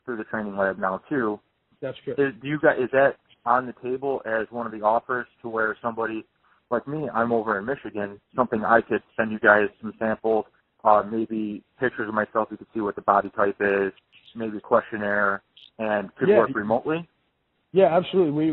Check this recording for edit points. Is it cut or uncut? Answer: uncut